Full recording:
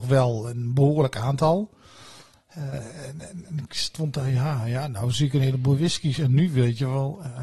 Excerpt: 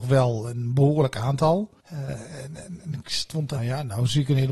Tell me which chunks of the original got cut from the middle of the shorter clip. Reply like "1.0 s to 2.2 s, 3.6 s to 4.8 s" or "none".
1.8 s to 2.4 s, 4.2 s to 4.6 s